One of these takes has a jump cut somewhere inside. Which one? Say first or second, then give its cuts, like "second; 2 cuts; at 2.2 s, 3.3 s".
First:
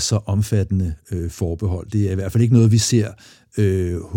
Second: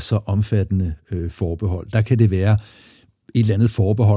second; 1 cut; at 1.9 s